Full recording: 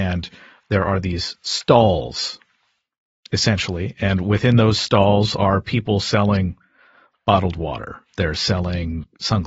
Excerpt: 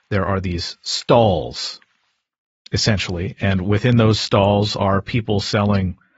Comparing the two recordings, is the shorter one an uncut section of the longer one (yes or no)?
yes